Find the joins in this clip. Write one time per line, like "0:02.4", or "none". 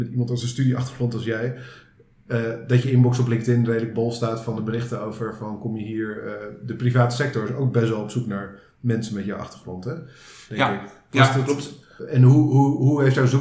0:12.0